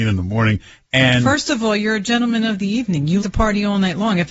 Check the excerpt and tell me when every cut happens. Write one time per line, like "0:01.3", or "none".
0:03.2